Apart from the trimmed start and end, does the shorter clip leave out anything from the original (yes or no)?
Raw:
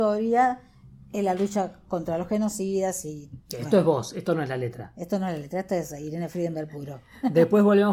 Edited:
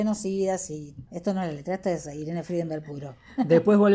yes